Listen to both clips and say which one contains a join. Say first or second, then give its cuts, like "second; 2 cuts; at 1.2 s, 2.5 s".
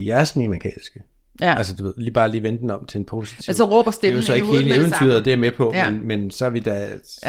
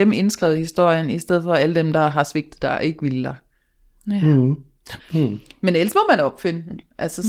second; 1 cut; at 5.0 s